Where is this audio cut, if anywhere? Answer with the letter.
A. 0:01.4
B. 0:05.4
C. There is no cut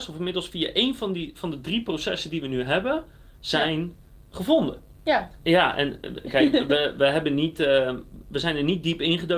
B